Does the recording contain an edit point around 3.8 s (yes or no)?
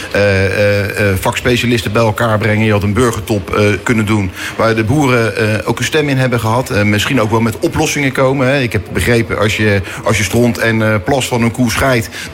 yes